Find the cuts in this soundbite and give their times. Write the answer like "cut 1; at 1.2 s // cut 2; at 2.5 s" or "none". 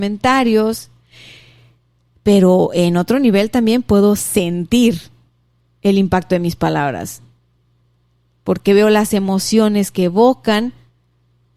none